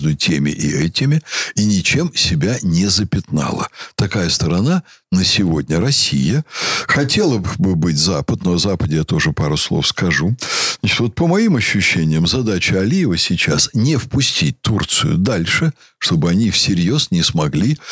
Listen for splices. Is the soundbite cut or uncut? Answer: uncut